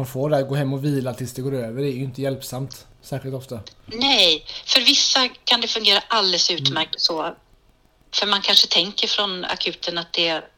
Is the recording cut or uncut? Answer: cut